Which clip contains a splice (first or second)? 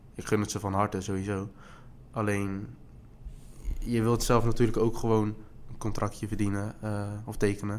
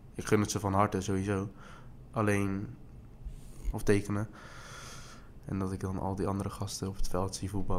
second